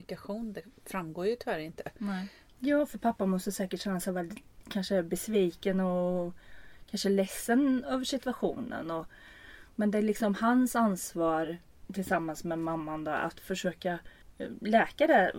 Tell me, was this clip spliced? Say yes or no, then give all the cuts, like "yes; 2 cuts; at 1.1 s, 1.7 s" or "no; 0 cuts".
yes; 1 cut; at 2.5 s